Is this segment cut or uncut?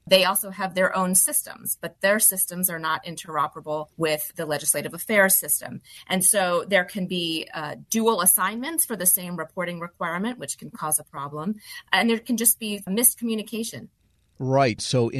uncut